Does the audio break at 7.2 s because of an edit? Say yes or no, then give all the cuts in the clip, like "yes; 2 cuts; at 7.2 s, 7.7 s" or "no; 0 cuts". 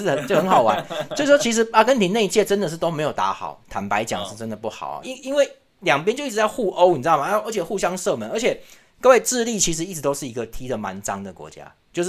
no; 1 cut; at 5.0 s